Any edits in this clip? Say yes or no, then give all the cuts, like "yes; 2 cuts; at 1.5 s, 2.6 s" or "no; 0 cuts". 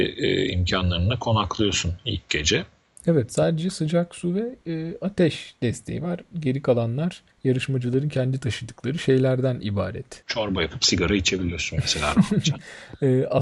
yes; 1 cut; at 7.3 s